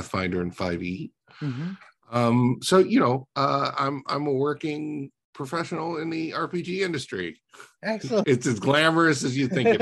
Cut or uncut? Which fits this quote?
cut